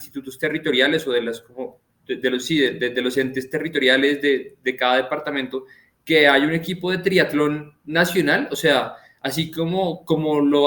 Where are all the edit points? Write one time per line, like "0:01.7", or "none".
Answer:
none